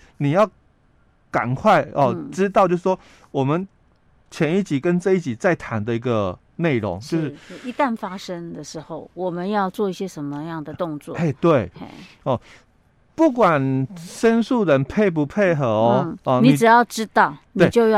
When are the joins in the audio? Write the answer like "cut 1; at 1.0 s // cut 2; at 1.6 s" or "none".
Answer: none